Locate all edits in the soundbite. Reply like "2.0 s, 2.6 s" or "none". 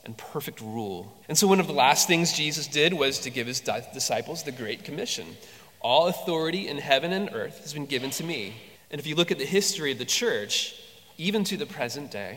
1.2 s, 8.7 s